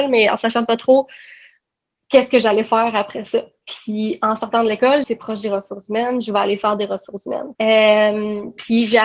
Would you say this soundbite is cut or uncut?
cut